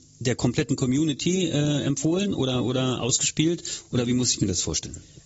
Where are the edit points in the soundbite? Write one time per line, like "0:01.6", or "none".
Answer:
none